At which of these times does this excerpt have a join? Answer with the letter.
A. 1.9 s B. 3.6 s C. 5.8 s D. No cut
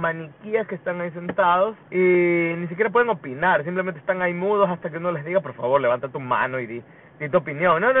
A